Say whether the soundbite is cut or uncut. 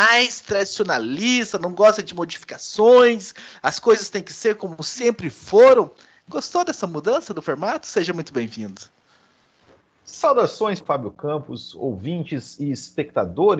cut